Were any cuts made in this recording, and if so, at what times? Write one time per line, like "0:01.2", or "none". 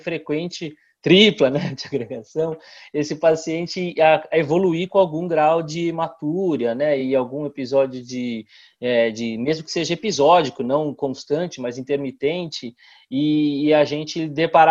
none